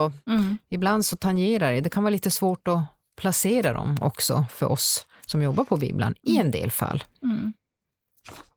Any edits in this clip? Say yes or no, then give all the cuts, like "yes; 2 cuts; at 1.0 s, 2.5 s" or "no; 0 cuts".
no; 0 cuts